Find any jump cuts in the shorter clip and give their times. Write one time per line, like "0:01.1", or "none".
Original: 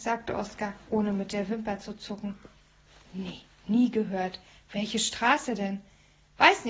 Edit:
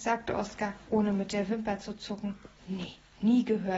0:02.6

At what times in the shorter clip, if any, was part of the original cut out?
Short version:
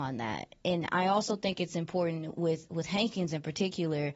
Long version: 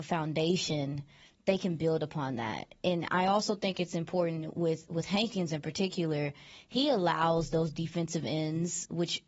none

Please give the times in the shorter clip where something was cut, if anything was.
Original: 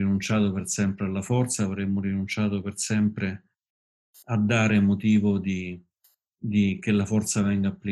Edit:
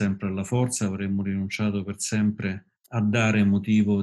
0:02.8

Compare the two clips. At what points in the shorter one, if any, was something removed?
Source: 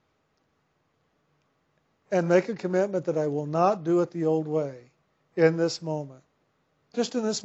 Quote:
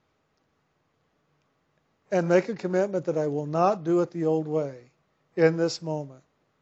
none

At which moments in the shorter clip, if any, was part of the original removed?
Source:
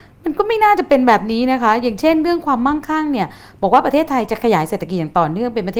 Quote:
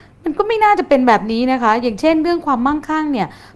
none

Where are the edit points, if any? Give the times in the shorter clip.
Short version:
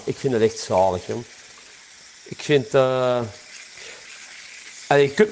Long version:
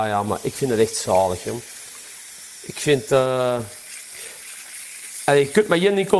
none

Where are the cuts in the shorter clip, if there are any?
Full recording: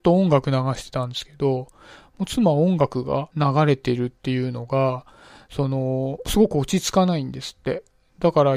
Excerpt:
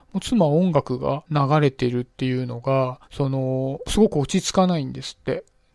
0:03.1

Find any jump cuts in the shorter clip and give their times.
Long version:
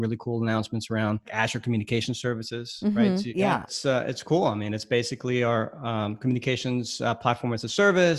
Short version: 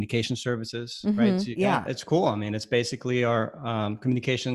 0:01.9

